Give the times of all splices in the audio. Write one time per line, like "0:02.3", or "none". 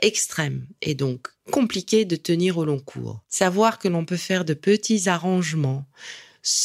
none